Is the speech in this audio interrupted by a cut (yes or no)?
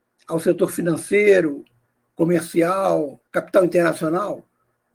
yes